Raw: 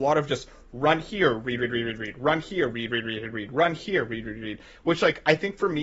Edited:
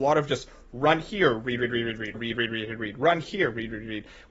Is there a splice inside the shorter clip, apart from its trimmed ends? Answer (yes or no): yes